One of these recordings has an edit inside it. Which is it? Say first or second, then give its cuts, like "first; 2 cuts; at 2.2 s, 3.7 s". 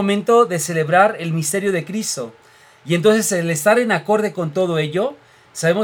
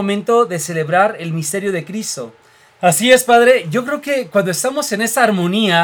second; 1 cut; at 2.7 s